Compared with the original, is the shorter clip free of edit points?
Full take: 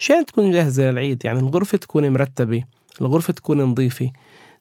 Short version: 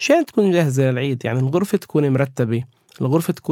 yes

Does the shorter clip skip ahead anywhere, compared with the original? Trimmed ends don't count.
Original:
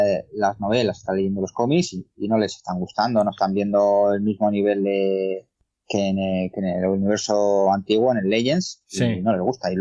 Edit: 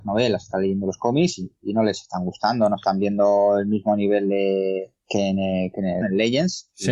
yes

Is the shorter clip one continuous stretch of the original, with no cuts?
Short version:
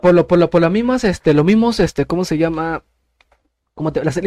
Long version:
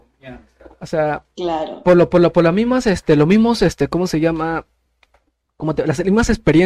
yes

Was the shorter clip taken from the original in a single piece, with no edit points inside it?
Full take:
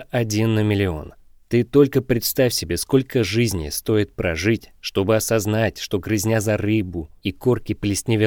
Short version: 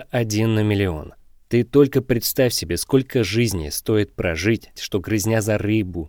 no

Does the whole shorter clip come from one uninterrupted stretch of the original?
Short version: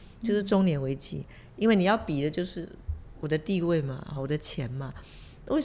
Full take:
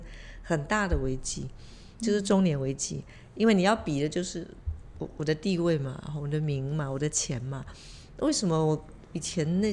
no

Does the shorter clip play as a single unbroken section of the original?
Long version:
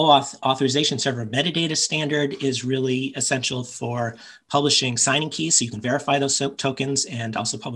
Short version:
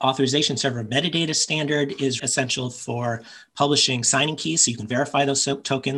no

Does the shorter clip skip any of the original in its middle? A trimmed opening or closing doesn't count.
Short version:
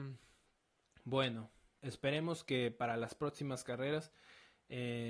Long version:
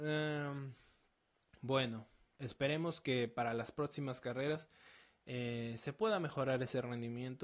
no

